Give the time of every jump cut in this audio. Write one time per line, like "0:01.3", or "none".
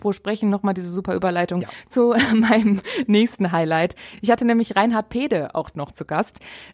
none